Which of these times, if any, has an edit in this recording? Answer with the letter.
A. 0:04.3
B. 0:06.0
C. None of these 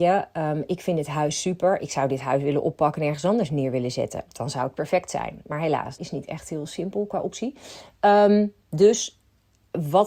B